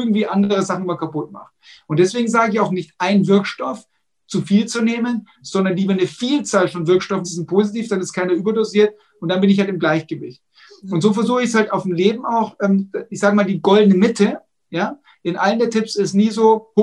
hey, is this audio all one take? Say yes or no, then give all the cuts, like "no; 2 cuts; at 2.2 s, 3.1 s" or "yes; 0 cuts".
no; 1 cut; at 7.2 s